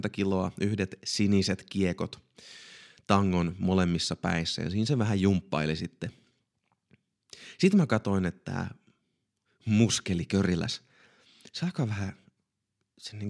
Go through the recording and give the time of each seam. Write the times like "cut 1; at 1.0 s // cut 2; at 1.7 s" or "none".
none